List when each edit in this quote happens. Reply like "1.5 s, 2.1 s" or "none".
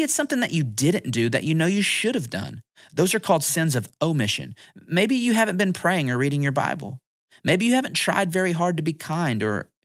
none